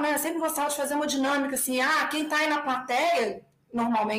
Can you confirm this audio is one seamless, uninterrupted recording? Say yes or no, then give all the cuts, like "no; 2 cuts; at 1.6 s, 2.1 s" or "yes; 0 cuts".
yes; 0 cuts